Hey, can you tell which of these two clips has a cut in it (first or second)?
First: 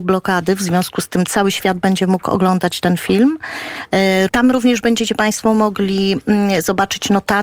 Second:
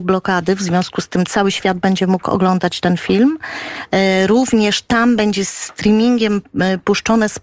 first